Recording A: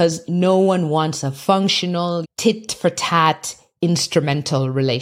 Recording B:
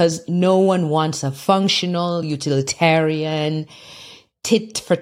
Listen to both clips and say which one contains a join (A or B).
A